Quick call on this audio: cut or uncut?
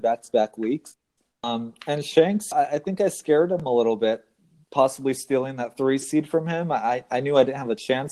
cut